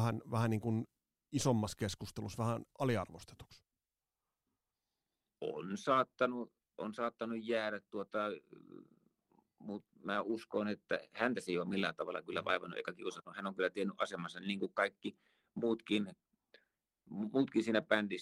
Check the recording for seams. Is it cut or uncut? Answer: uncut